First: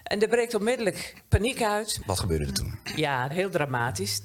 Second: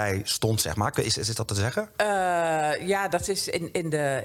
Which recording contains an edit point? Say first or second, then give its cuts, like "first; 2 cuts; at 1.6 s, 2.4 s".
first; 2 cuts; at 2.0 s, 3.3 s